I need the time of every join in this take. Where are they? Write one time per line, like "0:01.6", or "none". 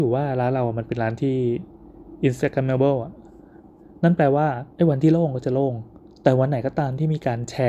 0:04.7